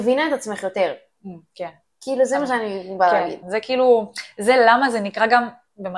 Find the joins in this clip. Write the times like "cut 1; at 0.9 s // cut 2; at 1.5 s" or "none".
cut 1; at 3.4 s